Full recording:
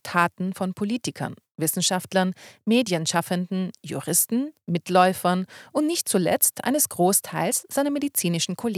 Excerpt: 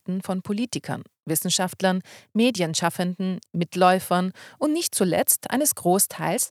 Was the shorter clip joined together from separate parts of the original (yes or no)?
yes